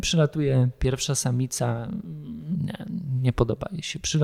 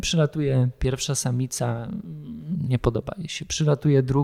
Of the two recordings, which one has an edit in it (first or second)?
second